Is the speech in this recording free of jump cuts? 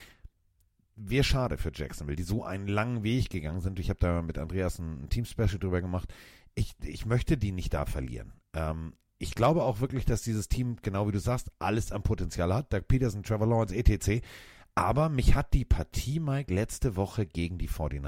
yes; 0 cuts

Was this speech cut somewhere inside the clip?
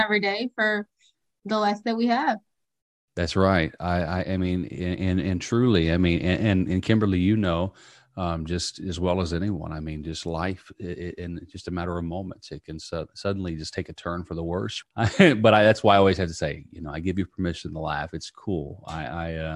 yes; 1 cut; at 14.8 s

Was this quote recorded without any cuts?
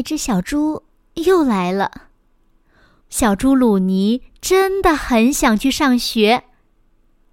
no; 1 cut; at 3.0 s

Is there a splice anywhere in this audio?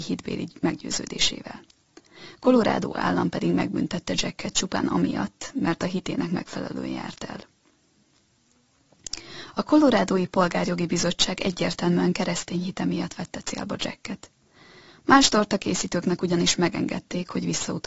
yes; 1 cut; at 2.4 s

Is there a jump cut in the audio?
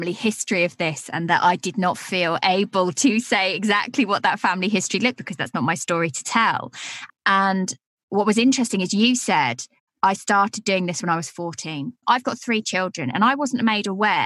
yes; 3 cuts; at 5.2 s, 7.1 s, 12.0 s

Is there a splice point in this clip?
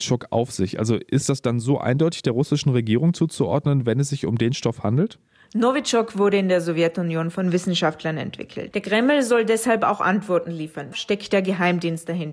yes; 2 cuts; at 8.7 s, 10.9 s

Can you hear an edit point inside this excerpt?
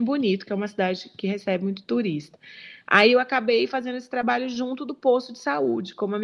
no; 0 cuts

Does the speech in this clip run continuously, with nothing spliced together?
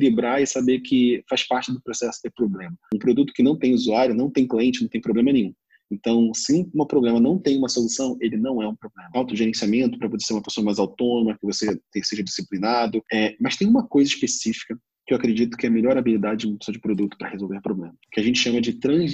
no; 1 cut; at 9.1 s

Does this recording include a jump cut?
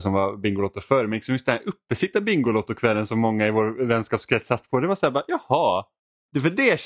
no; 0 cuts

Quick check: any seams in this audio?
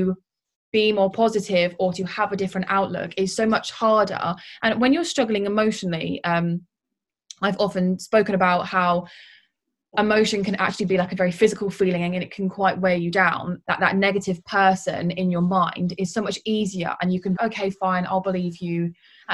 yes; 2 cuts; at 13.6 s, 17.3 s

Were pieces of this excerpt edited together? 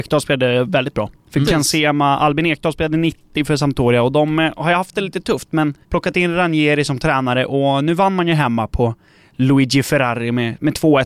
yes; 2 cuts; at 1.4 s, 5.8 s

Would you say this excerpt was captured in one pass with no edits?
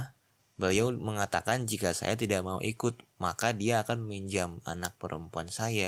yes; 0 cuts

